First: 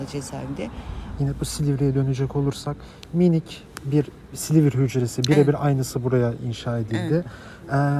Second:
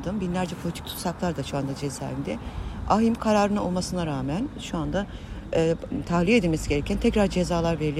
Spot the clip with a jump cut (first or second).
first